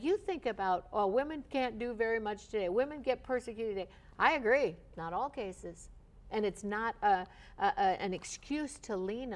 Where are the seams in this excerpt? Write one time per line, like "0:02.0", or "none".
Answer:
0:04.9